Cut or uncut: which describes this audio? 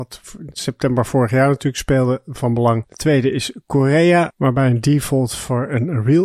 uncut